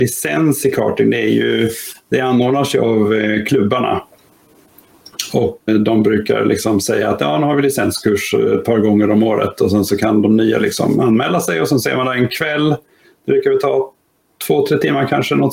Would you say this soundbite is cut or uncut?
cut